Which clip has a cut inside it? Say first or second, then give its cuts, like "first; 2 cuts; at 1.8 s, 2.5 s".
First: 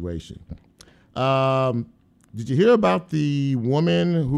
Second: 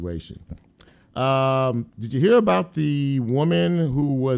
second; 1 cut; at 1.9 s